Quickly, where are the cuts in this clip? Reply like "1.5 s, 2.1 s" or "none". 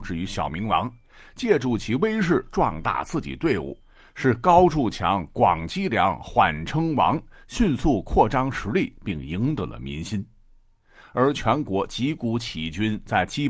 none